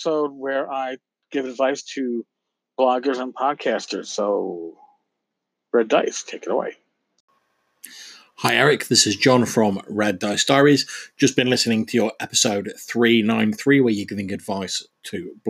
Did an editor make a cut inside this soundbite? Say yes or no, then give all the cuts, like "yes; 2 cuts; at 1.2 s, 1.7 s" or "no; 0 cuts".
no; 0 cuts